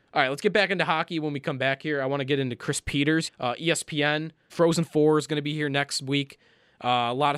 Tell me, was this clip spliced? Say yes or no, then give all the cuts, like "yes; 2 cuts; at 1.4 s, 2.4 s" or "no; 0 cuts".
yes; 2 cuts; at 3.3 s, 4.5 s